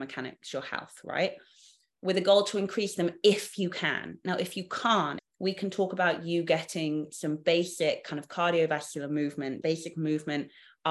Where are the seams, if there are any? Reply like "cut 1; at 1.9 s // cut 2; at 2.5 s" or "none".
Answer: cut 1; at 5.2 s // cut 2; at 9.6 s